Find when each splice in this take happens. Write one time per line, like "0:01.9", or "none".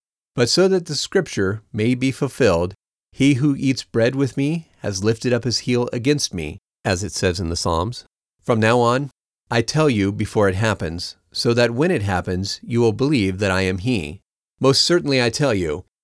none